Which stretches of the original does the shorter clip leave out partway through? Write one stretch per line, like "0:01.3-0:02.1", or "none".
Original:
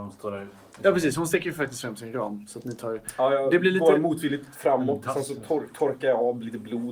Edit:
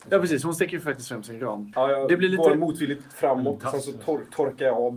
0:02.5-0:03.2